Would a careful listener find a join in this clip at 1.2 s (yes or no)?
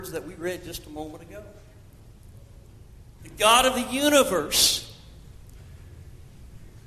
no